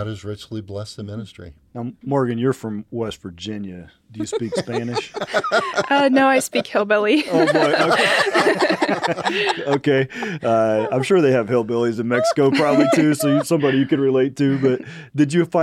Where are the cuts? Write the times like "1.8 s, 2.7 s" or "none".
none